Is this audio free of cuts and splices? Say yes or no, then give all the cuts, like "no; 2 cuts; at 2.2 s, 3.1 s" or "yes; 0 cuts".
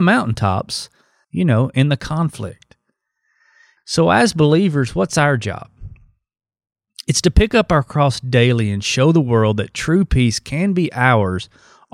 no; 2 cuts; at 1.2 s, 3.8 s